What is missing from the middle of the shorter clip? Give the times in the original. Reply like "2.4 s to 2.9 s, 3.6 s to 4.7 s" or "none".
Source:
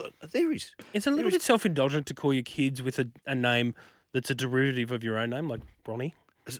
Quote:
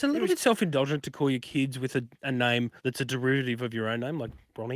3.8 s to 4.1 s